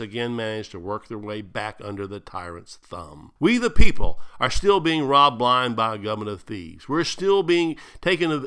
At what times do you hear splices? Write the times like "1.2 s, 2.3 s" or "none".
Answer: 3.4 s